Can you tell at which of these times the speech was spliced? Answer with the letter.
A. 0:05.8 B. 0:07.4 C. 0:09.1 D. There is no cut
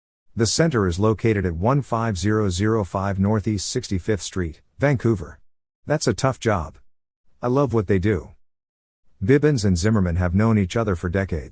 A